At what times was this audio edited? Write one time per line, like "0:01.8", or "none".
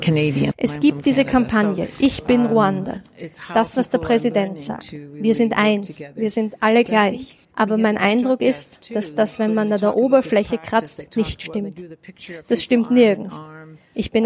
0:07.4